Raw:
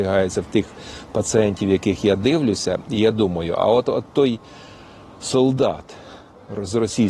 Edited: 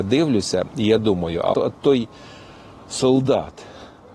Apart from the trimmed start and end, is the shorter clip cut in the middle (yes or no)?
yes